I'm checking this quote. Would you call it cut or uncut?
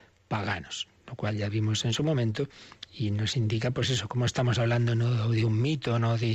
uncut